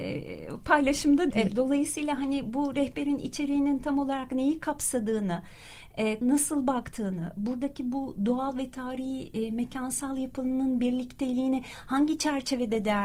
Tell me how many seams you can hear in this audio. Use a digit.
2